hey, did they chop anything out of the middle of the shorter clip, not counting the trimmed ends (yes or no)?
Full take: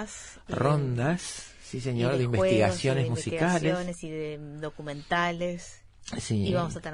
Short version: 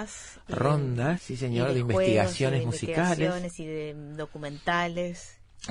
yes